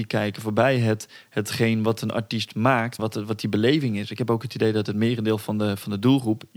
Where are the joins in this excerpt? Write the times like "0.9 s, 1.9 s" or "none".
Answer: 3.0 s